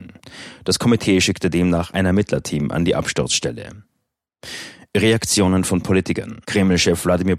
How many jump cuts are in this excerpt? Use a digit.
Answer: 1